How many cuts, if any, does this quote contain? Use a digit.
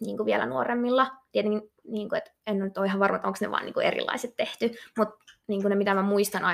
0